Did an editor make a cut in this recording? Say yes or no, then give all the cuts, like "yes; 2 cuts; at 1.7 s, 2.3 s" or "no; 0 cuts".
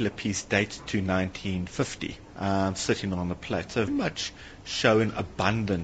yes; 2 cuts; at 2.3 s, 3.9 s